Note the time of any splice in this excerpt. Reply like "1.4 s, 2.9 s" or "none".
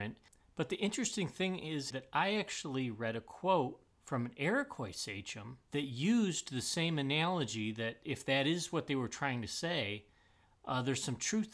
1.9 s, 3.9 s, 5.7 s